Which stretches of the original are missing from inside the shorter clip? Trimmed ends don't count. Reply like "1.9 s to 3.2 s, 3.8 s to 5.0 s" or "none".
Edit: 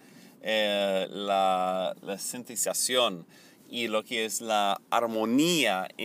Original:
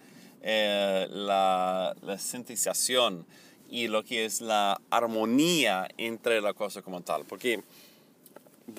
none